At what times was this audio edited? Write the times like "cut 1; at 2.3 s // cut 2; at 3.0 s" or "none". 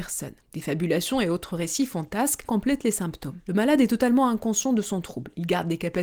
cut 1; at 2.4 s